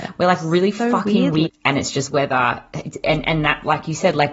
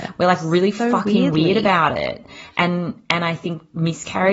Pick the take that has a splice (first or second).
first